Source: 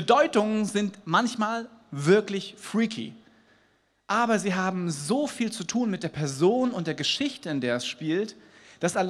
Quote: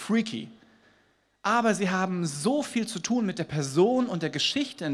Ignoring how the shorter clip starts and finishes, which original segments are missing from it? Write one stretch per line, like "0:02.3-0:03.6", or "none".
none